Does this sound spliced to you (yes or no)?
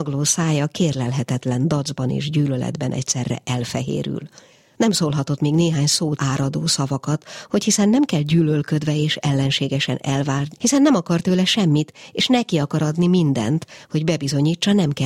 yes